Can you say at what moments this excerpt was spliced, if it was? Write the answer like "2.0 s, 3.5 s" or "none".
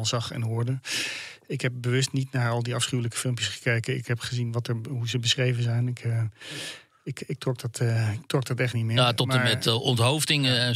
none